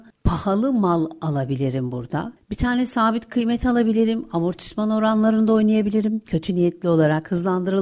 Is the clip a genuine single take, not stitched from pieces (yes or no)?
yes